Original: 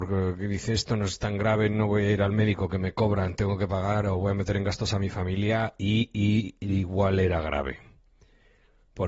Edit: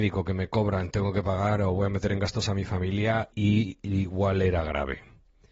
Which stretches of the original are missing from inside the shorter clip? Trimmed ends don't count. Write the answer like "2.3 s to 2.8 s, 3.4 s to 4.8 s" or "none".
5.8 s to 6.1 s